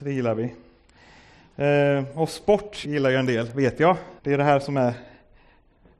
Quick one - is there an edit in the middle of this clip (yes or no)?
yes